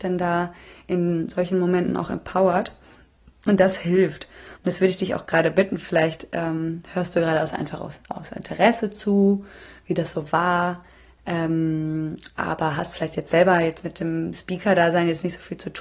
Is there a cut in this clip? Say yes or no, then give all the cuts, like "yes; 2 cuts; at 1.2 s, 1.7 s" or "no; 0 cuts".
yes; 1 cut; at 4.6 s